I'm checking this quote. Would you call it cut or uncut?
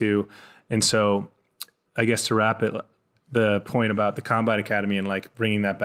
cut